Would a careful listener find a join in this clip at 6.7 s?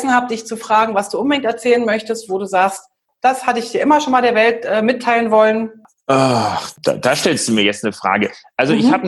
yes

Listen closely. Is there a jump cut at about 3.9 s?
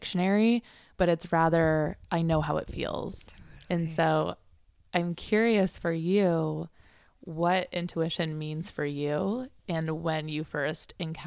no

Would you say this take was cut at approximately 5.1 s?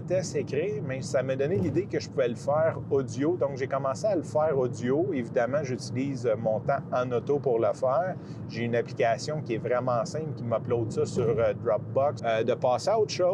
no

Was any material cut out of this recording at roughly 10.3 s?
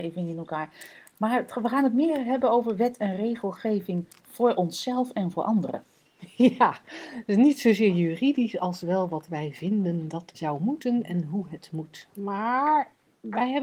yes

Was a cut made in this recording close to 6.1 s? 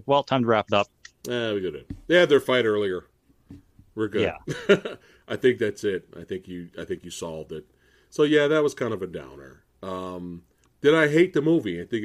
no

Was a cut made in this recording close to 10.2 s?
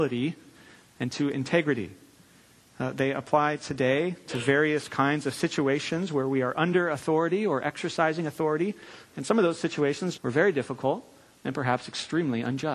yes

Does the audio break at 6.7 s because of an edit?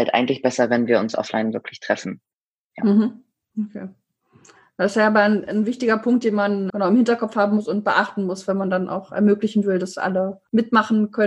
yes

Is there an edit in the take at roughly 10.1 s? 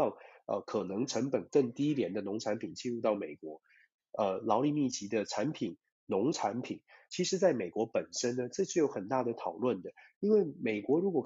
no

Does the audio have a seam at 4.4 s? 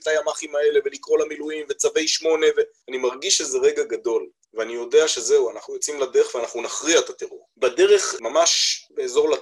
yes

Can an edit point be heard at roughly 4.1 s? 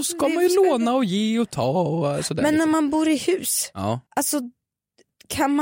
yes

